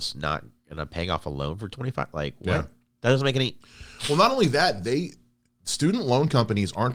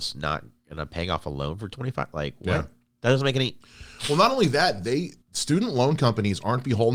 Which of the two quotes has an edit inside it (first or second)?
second